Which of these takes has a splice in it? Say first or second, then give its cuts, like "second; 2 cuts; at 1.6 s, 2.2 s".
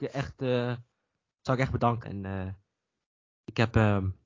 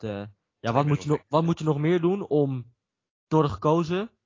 first; 1 cut; at 2.0 s